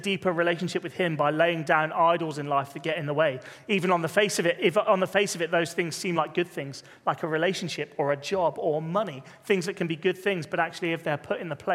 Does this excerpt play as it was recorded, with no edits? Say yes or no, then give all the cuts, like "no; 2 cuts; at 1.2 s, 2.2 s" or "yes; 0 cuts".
yes; 0 cuts